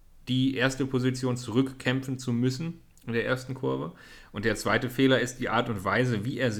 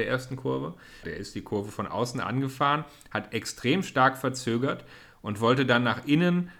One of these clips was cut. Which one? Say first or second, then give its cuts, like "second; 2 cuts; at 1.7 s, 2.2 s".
second; 1 cut; at 1.0 s